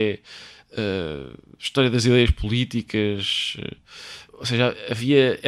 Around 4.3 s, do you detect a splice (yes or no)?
yes